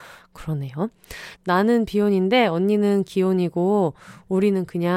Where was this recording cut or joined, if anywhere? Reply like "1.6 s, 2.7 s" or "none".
1.4 s

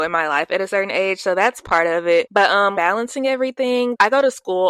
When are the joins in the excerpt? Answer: 2.7 s

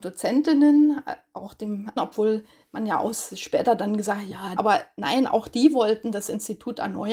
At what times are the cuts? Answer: 2.0 s, 4.6 s

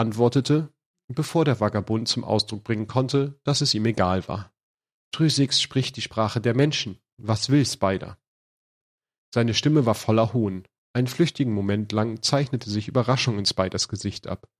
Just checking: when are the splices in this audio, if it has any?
none

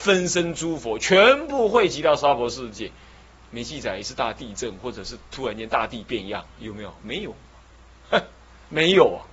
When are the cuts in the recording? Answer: 3.3 s

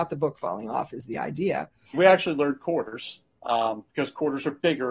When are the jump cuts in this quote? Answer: 1.9 s

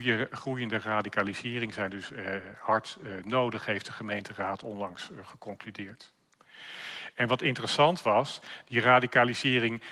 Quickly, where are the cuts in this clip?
none

